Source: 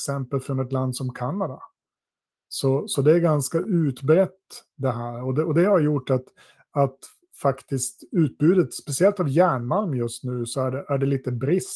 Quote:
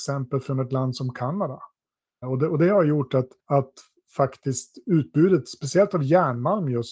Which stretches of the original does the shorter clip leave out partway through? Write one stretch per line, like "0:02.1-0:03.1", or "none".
0:02.2-0:05.2
0:06.3-0:06.6